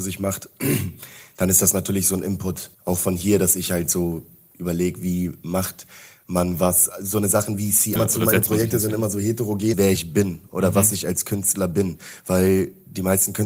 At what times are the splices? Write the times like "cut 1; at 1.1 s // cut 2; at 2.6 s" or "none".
cut 1; at 2.7 s // cut 2; at 8.0 s // cut 3; at 9.7 s